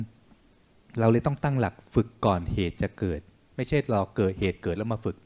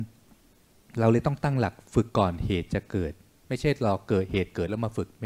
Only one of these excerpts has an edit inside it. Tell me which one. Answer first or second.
second